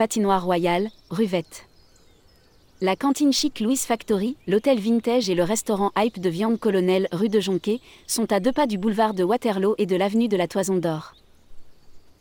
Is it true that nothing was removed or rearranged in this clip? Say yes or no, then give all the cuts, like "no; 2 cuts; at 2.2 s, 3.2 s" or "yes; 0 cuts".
no; 2 cuts; at 2.6 s, 4.4 s